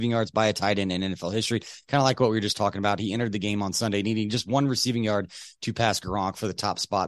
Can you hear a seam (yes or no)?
no